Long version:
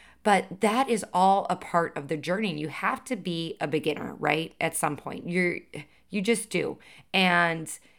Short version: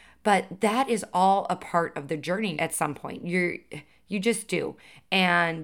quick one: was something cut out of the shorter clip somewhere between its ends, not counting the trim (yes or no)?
yes